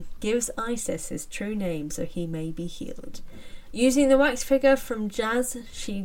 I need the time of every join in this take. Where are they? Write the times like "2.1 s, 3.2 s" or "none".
3.7 s